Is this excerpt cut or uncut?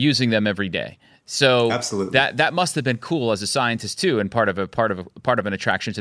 uncut